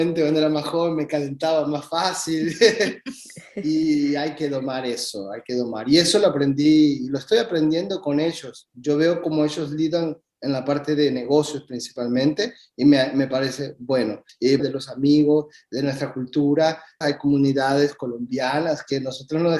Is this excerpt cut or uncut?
cut